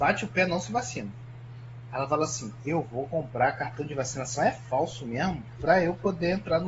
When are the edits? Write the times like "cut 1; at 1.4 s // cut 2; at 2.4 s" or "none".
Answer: none